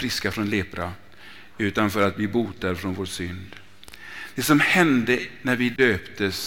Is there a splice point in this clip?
no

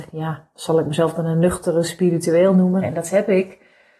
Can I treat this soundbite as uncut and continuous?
no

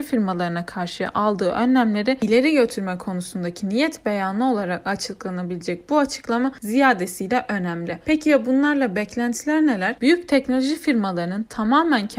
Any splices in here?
yes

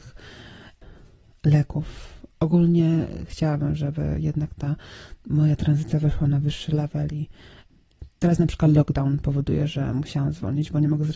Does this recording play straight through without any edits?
yes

